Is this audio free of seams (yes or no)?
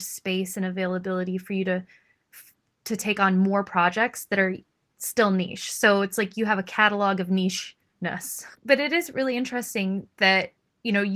no